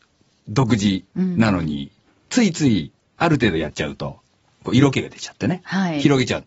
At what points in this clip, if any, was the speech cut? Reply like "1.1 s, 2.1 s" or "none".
none